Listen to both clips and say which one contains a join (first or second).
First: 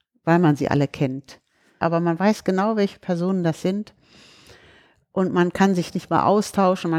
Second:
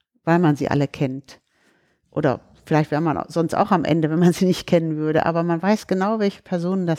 first